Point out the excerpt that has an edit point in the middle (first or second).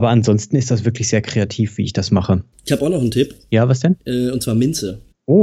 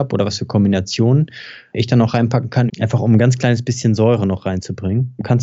second